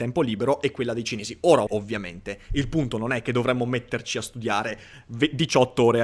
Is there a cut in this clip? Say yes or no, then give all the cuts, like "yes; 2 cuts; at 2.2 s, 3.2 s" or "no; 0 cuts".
yes; 1 cut; at 1.7 s